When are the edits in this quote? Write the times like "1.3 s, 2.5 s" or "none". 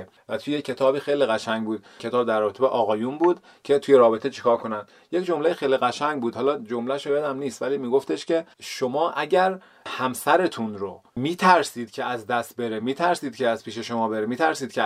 8.5 s, 11.1 s